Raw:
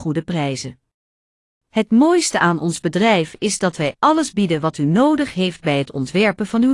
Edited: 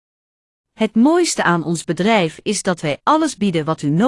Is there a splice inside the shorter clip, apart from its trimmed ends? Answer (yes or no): no